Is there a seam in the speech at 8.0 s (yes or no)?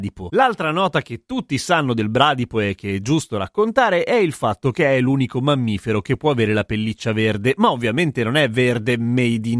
no